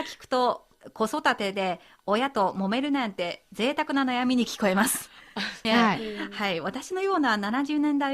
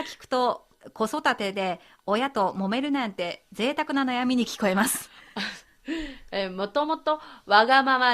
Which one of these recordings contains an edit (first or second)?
first